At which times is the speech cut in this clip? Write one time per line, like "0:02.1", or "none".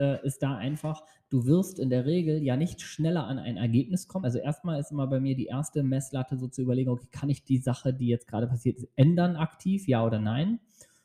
none

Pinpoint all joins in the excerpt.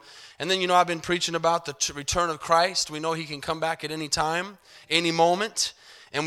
none

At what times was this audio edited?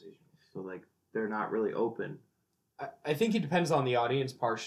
none

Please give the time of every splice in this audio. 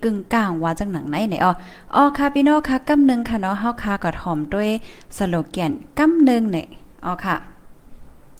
0:06.9

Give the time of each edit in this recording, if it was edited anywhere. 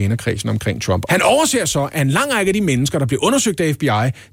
0:01.1

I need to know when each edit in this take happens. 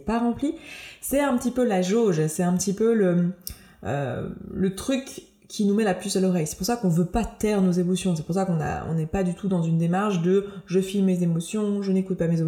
none

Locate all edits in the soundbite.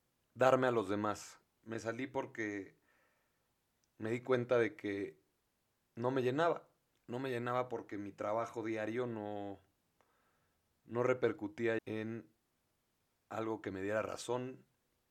0:01.6
0:11.8

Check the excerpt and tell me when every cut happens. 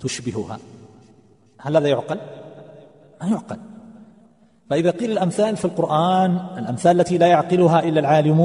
none

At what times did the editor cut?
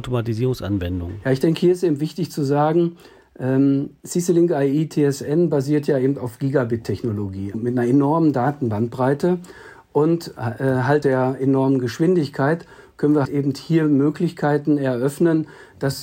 0:07.5
0:11.0
0:13.3

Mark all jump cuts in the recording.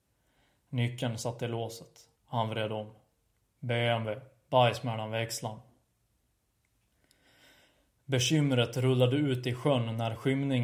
0:02.2

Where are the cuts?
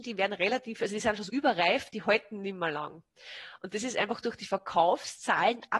0:01.3

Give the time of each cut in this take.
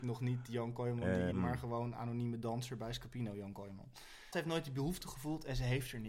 0:01.3
0:04.3

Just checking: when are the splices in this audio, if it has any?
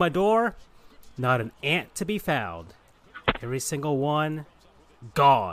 none

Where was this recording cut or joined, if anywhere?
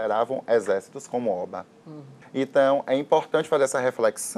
0:02.2

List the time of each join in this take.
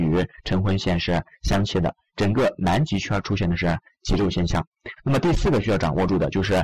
0:05.0

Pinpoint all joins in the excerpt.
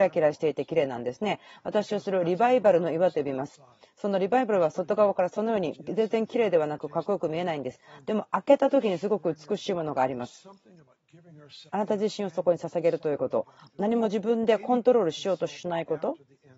0:05.7
0:11.7

